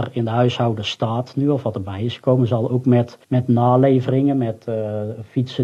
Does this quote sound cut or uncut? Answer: cut